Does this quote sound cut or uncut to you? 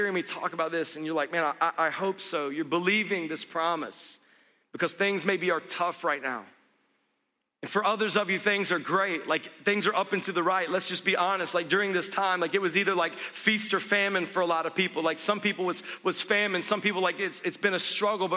uncut